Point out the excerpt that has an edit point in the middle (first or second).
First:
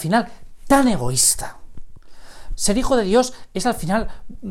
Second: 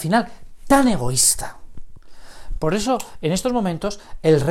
first